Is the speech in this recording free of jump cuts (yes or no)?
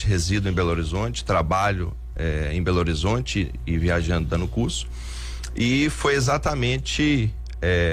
yes